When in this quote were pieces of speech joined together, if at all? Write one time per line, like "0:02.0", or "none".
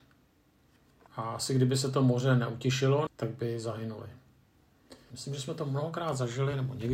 0:01.1
0:03.1
0:05.1